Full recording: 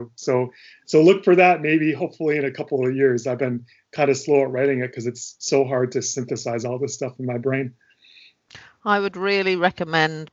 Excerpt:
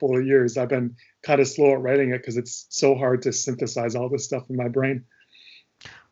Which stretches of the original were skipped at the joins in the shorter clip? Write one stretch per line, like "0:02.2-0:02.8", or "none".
none

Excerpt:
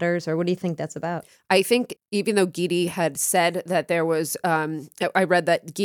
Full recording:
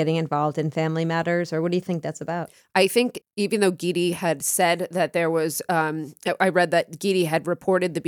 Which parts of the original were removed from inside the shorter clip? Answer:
none

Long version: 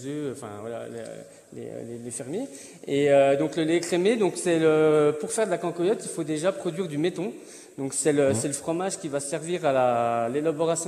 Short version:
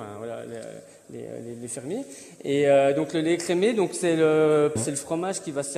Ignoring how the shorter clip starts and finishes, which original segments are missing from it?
0:05.2-0:08.3

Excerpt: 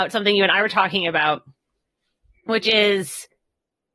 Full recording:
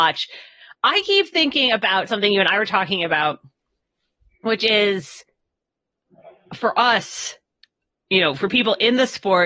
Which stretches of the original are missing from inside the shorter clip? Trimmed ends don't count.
none

